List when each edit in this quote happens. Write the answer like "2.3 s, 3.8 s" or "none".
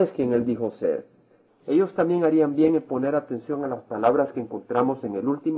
1.5 s